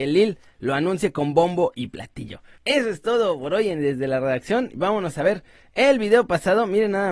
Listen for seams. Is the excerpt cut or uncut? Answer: cut